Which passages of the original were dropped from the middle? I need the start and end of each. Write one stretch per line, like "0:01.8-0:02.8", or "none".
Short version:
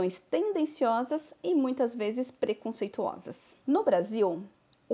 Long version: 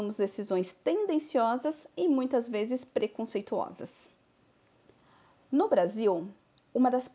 0:04.1-0:05.5